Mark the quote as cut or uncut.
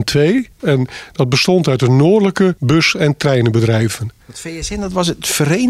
uncut